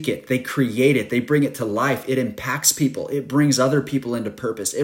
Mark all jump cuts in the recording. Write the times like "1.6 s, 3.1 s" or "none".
none